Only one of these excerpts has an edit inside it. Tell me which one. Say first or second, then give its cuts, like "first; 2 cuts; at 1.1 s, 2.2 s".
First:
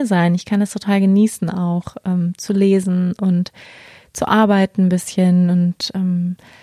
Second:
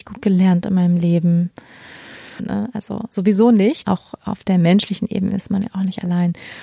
second; 2 cuts; at 2.4 s, 3.8 s